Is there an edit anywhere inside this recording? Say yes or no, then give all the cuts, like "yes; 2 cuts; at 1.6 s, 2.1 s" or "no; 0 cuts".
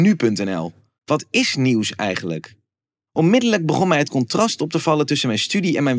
yes; 2 cuts; at 1.0 s, 3.1 s